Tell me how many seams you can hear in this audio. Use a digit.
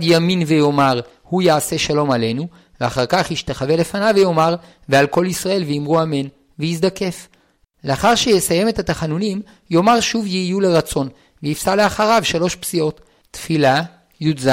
2